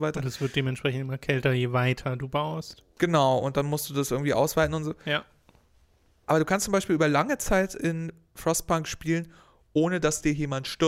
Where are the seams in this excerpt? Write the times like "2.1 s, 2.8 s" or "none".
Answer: none